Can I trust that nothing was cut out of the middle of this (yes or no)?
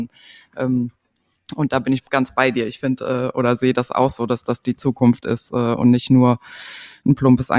yes